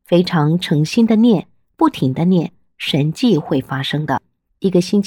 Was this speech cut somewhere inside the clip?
no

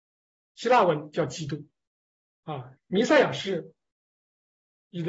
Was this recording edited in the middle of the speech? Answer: yes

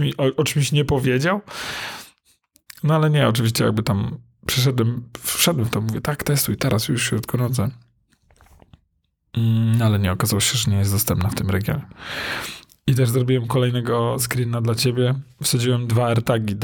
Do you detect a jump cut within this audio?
no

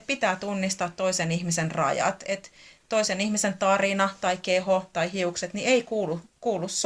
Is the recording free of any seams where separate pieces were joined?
yes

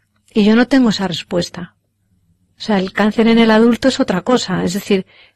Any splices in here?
no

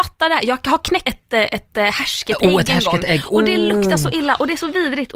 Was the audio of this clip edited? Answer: yes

